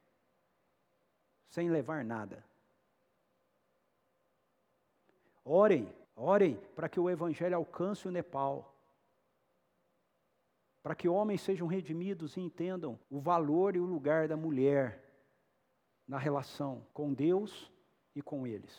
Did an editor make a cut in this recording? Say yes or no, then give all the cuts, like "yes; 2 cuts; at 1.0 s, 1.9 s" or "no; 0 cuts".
yes; 3 cuts; at 6.0 s, 13.0 s, 16.9 s